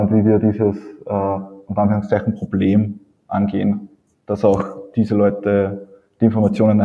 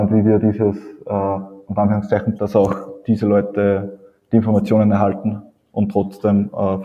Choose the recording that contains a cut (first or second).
second